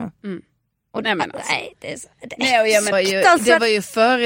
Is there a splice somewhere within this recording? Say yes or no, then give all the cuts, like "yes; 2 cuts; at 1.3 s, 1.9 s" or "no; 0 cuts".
yes; 1 cut; at 2.9 s